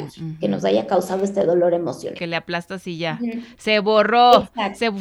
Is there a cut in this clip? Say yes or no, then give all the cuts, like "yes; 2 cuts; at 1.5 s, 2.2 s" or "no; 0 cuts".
yes; 1 cut; at 2.2 s